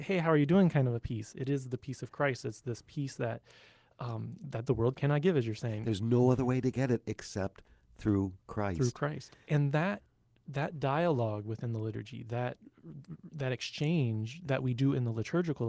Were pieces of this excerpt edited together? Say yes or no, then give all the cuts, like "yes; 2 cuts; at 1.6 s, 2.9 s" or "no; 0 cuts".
no; 0 cuts